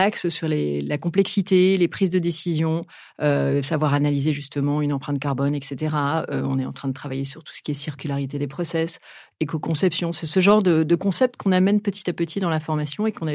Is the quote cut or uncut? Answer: uncut